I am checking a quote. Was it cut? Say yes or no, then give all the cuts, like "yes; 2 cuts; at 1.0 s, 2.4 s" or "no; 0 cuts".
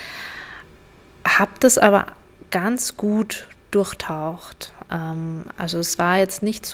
no; 0 cuts